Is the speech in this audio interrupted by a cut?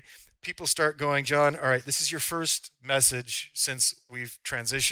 no; 0 cuts

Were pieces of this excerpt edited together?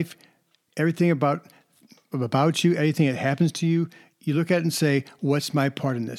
no; 0 cuts

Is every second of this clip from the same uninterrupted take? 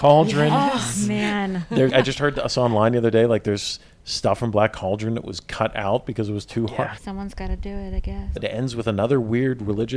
no; 3 cuts; at 1.9 s, 7.0 s, 8.4 s

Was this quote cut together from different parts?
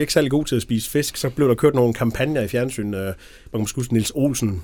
no; 0 cuts

